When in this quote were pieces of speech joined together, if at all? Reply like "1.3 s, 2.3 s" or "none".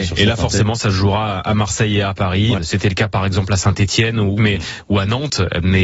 2.5 s, 4.4 s